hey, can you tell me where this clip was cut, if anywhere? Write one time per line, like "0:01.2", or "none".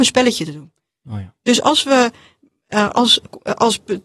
none